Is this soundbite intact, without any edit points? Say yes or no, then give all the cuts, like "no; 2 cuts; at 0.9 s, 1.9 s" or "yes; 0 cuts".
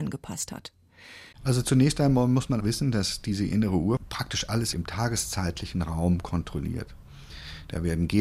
no; 2 cuts; at 1.3 s, 2.6 s